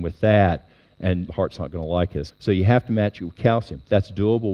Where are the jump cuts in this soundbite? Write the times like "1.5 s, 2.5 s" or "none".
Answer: 1.3 s, 2.3 s